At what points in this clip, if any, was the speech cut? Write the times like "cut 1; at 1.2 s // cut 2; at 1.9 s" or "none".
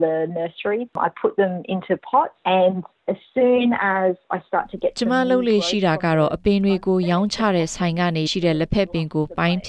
cut 1; at 8.3 s